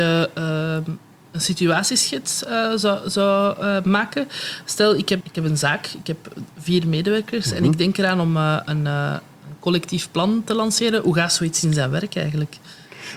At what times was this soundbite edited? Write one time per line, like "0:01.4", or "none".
0:05.2